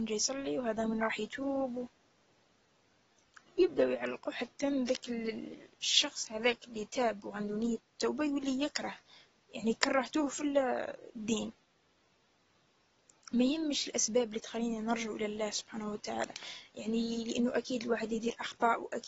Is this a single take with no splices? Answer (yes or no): yes